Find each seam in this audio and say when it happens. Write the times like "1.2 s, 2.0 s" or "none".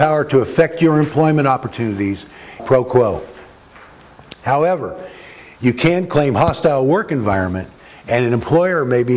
2.6 s